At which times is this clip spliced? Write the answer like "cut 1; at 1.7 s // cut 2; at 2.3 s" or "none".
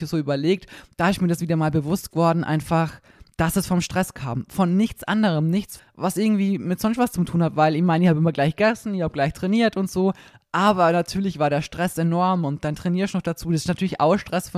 cut 1; at 5.8 s